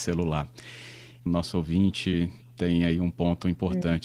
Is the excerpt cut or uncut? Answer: cut